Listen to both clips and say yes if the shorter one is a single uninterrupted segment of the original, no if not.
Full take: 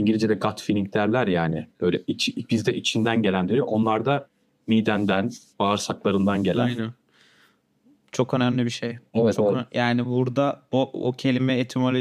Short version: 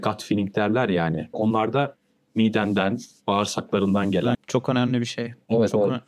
no